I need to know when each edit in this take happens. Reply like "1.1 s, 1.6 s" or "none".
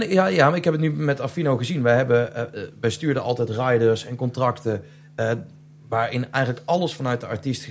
none